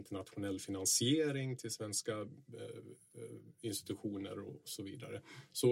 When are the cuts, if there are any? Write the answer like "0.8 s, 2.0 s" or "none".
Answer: none

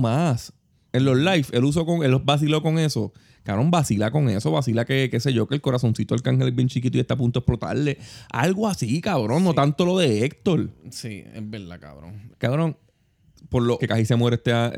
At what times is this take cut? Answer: 12.3 s, 13.8 s

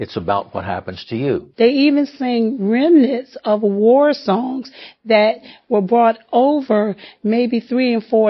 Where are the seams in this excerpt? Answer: 1.5 s

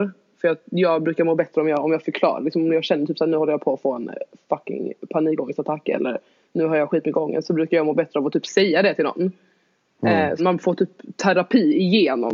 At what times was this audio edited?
10.4 s

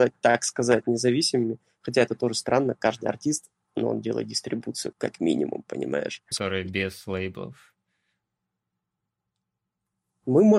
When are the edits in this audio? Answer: 4.9 s, 6.3 s

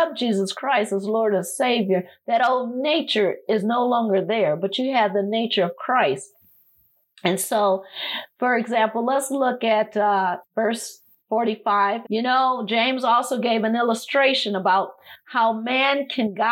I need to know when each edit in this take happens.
10.4 s, 12.0 s

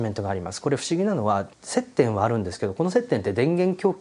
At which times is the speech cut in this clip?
1.5 s

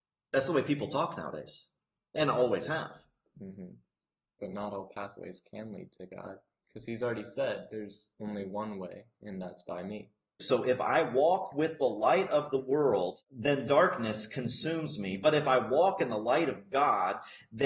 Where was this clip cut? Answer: 10.4 s

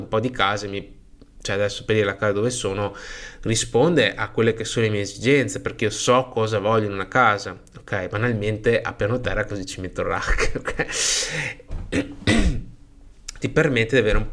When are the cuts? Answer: 11.7 s, 13.4 s

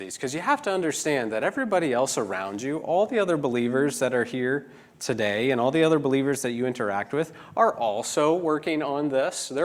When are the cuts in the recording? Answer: none

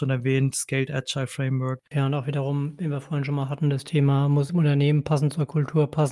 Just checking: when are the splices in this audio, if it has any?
1.9 s, 4.5 s

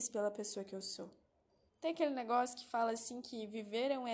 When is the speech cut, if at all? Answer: 1.7 s

